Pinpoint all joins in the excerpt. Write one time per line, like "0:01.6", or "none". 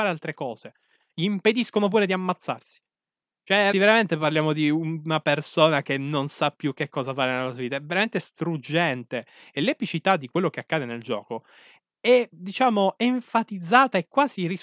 0:03.7